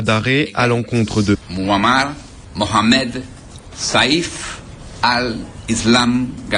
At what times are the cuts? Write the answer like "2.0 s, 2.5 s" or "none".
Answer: 3.7 s